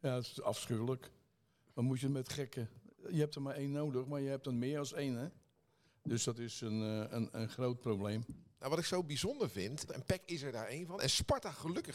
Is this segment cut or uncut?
cut